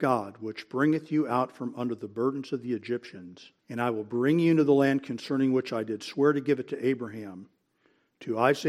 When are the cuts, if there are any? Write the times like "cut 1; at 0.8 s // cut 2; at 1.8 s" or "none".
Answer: cut 1; at 3.6 s